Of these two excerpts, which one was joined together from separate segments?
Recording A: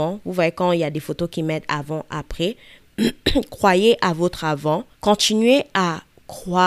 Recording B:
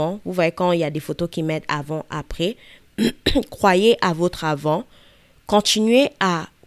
A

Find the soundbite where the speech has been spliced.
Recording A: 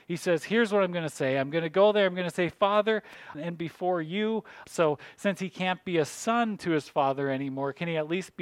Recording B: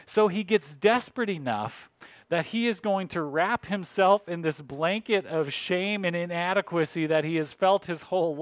A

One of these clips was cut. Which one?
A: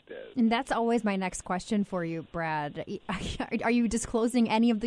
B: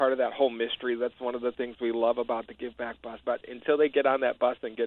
B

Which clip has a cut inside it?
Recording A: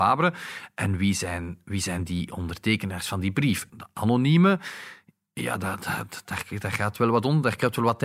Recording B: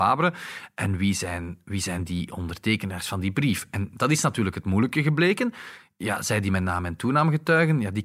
A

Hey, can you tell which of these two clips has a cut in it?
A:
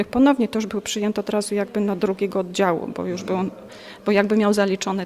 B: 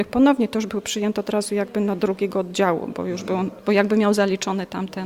B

